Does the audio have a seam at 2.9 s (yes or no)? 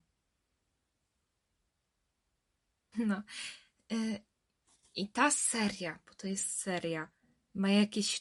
yes